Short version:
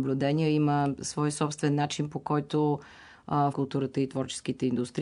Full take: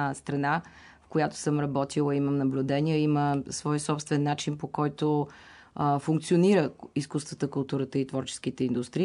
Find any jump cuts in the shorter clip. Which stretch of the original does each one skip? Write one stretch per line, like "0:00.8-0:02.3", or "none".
0:06.0-0:07.5